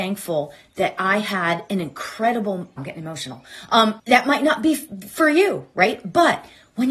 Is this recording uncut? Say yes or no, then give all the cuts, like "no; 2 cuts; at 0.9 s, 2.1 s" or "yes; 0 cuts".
no; 2 cuts; at 2.8 s, 4.0 s